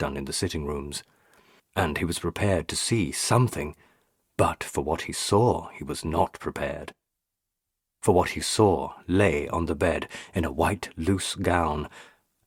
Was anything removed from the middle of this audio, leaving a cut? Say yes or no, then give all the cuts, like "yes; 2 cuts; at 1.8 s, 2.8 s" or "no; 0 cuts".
yes; 1 cut; at 1.6 s